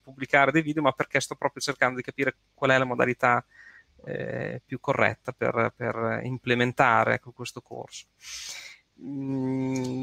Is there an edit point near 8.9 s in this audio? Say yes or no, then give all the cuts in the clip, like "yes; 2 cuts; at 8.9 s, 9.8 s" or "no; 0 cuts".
yes; 1 cut; at 8.9 s